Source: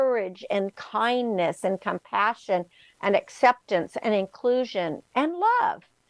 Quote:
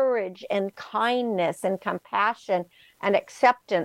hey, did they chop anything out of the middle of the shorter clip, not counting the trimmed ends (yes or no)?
no